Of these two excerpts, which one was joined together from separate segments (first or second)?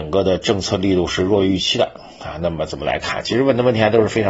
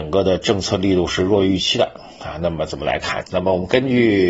second